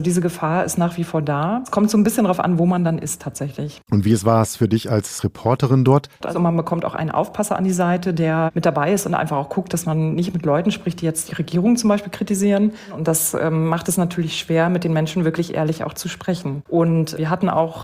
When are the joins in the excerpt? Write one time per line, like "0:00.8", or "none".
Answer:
0:06.2